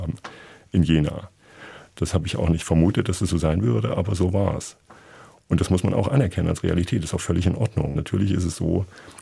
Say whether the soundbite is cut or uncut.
uncut